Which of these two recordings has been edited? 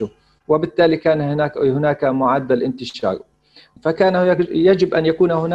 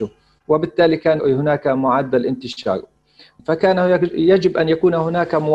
second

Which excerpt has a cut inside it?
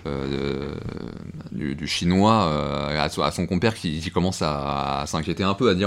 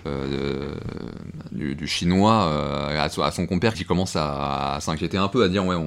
second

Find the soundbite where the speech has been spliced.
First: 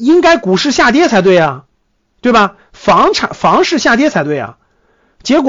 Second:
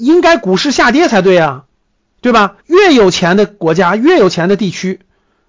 second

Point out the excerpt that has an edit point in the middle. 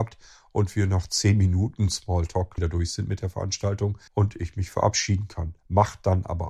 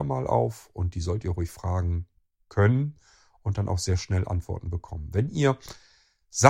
first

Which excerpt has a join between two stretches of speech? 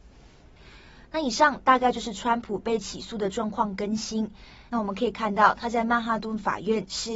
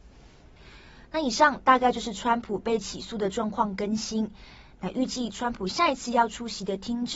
first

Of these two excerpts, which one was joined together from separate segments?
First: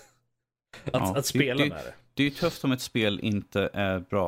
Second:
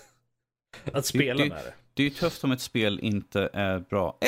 second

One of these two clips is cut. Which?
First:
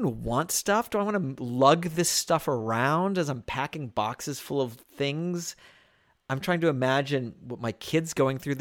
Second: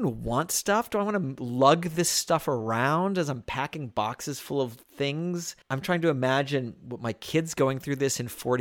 second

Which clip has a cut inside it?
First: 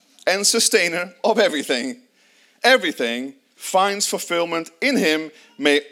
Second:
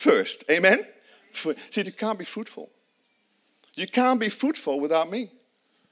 second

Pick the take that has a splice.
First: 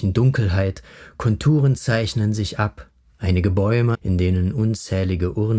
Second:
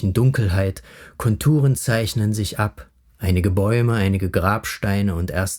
first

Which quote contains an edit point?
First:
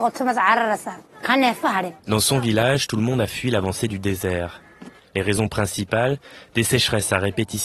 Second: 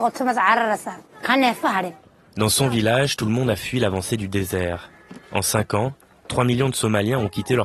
first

